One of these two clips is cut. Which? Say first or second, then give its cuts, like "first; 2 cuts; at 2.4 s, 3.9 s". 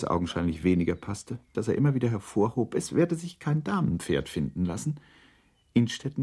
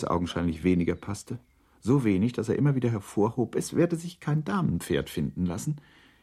first; 1 cut; at 1.5 s